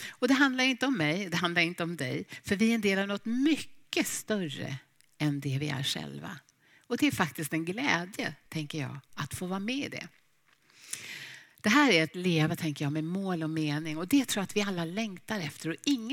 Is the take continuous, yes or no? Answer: yes